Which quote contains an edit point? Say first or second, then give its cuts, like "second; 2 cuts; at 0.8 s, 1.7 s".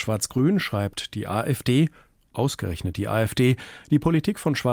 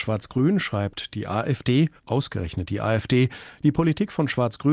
second; 1 cut; at 2.0 s